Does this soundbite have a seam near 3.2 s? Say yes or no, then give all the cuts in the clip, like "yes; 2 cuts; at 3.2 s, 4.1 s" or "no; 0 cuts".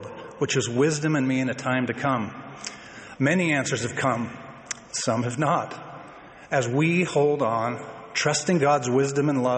yes; 1 cut; at 3.2 s